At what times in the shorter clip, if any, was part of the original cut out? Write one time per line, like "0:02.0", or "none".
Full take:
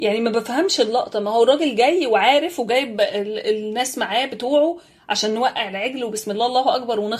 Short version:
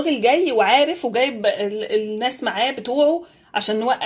none